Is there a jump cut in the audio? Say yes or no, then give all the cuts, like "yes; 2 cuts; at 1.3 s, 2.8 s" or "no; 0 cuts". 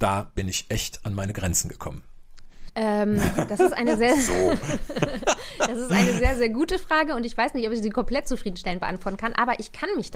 yes; 1 cut; at 2.7 s